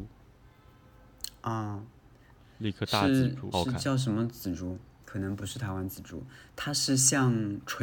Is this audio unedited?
no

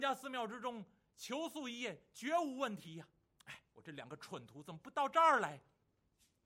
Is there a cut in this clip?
no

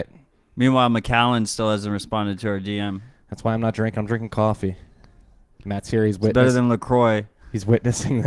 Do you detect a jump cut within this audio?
no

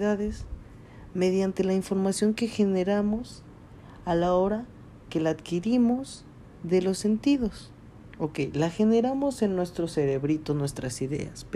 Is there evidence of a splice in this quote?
no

